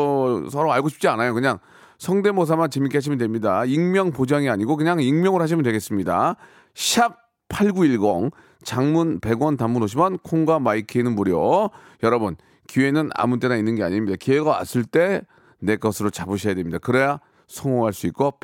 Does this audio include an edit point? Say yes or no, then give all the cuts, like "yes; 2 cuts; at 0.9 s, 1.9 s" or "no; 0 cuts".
no; 0 cuts